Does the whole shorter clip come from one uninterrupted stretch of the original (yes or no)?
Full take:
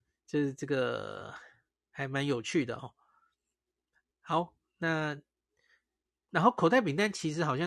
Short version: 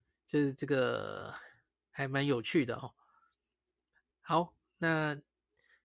yes